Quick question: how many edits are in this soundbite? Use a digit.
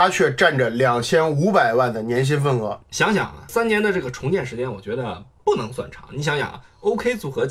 1